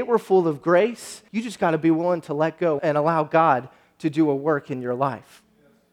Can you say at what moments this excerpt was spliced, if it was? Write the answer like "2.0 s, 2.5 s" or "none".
1.3 s, 2.8 s

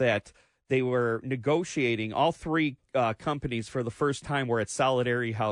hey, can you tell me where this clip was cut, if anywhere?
none

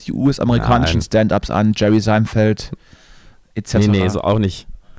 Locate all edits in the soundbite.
none

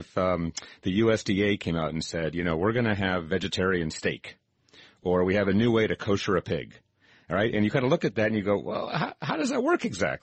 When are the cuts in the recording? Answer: none

